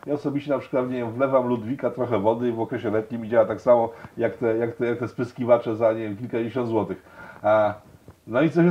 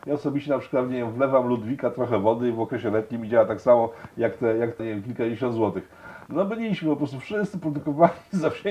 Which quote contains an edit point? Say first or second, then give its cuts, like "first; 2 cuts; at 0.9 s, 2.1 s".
second; 2 cuts; at 4.8 s, 6.3 s